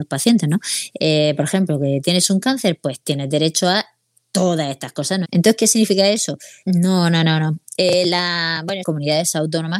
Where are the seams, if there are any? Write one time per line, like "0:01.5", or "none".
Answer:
0:05.2
0:06.6
0:08.8

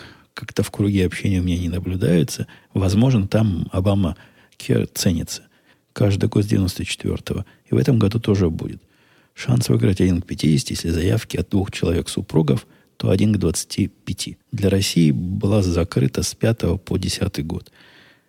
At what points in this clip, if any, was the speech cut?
0:05.7
0:14.4

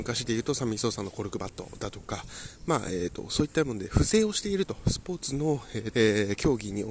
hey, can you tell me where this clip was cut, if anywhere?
0:05.9

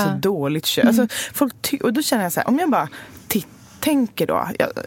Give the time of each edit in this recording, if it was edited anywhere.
none

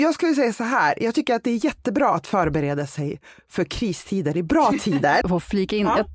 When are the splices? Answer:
0:05.2

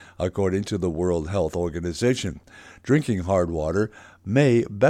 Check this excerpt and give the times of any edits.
none

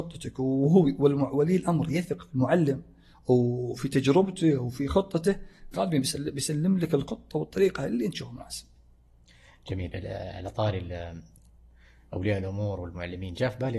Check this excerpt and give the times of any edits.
0:05.7

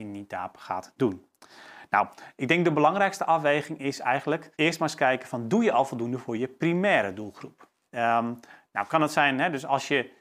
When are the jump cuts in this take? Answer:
0:04.5
0:07.8

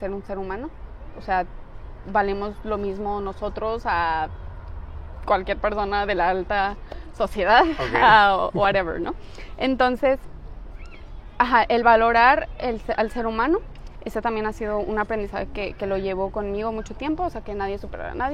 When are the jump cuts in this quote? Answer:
none

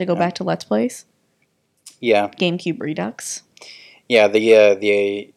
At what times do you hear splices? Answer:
none

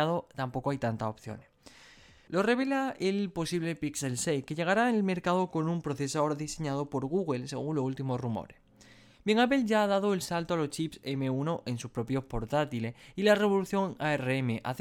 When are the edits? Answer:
0:02.3

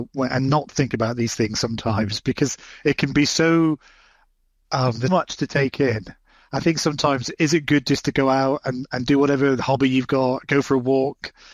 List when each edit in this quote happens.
0:05.1

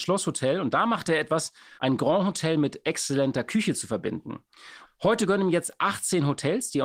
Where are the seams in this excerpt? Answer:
0:01.8
0:04.8

